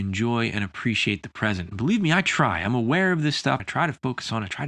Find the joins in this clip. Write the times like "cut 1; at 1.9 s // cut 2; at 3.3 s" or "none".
cut 1; at 3.6 s